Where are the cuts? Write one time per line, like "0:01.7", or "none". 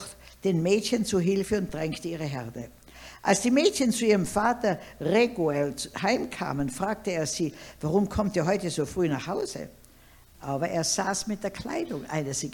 0:10.3